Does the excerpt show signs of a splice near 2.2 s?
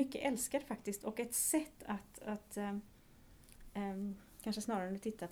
no; 0 cuts

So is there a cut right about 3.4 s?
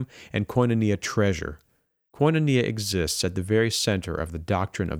no; 1 cut; at 2.1 s

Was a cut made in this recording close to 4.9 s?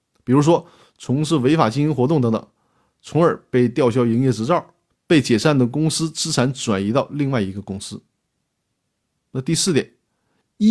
yes; 1 cut; at 4.9 s

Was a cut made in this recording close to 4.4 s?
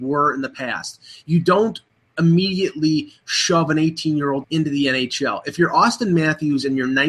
yes; 1 cut; at 4.4 s

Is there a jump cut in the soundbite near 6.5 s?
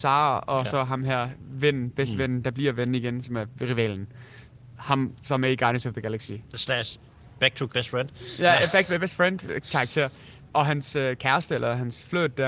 yes; 1 cut; at 6.5 s

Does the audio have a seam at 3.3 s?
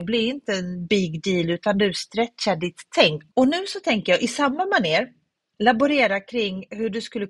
yes; 1 cut; at 3.3 s

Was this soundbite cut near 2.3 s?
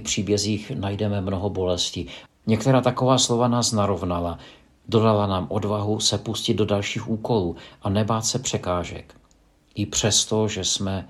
yes; 2 cuts; at 2.3 s, 9.6 s

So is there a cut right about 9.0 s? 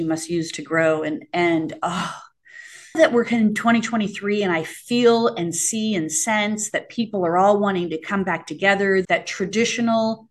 yes; 2 cuts; at 2.9 s, 9.0 s

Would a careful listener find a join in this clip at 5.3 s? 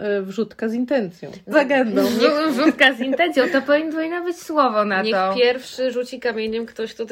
no; 1 cut; at 1.5 s

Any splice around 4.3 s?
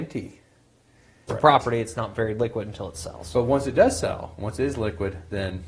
no; 1 cut; at 1.3 s

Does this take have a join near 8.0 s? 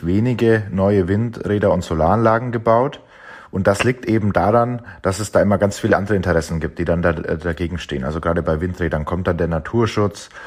no; 0 cuts

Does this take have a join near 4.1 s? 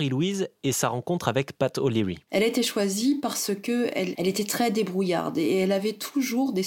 yes; 1 cut; at 4.1 s

